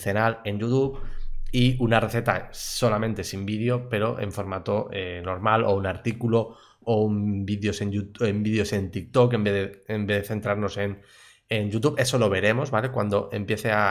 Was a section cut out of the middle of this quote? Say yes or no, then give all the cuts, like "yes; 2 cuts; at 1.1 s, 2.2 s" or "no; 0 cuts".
no; 0 cuts